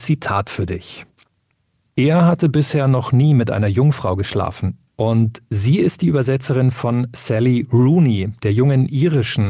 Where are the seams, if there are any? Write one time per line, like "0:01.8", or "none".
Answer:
0:01.9
0:04.9